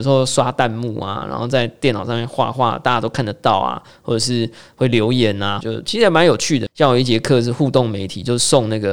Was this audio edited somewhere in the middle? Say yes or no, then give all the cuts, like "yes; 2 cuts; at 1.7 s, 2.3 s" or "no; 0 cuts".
yes; 2 cuts; at 5.6 s, 6.7 s